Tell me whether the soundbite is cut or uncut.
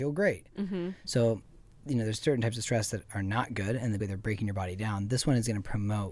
cut